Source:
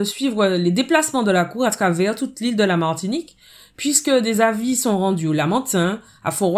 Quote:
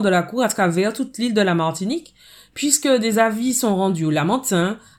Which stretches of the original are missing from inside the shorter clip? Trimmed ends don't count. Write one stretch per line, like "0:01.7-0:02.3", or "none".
none